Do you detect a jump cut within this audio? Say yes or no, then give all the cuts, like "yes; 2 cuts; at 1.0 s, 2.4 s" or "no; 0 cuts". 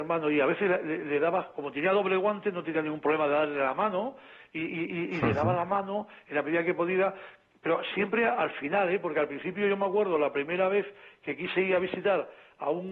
yes; 1 cut; at 7.9 s